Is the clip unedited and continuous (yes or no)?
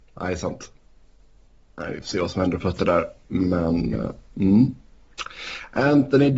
yes